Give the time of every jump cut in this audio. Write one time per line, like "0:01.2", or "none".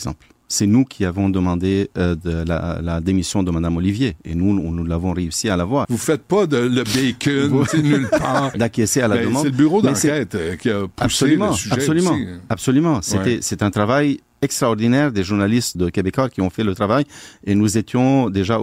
0:05.8
0:08.5
0:15.7